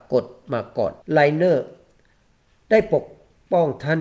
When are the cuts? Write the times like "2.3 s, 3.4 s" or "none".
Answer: 1.0 s